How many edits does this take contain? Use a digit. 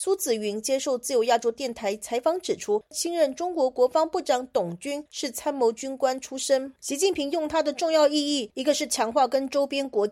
0